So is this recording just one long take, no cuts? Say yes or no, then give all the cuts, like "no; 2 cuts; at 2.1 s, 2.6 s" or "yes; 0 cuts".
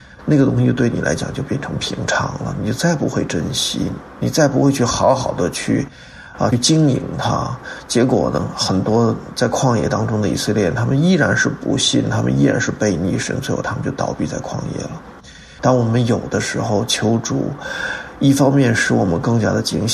no; 1 cut; at 15.6 s